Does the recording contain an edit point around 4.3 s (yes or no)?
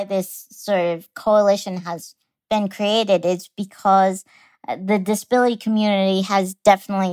no